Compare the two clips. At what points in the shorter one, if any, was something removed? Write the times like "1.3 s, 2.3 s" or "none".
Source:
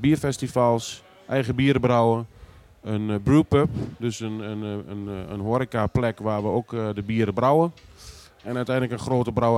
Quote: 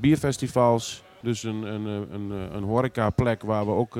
1.2 s